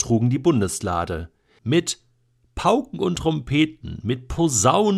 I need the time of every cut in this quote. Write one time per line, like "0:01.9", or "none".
0:01.6